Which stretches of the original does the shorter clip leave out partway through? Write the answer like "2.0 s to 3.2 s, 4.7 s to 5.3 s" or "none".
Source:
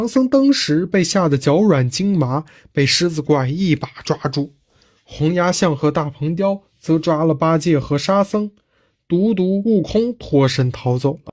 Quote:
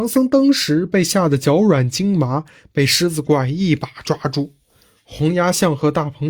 none